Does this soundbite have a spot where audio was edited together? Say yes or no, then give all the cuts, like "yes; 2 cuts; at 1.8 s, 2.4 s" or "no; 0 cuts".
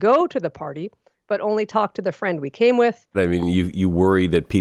yes; 1 cut; at 3.1 s